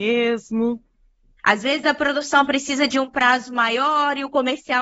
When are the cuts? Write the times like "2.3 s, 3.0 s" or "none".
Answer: 1.4 s